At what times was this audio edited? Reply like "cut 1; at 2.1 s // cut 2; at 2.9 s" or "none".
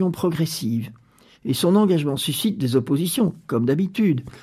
cut 1; at 1.3 s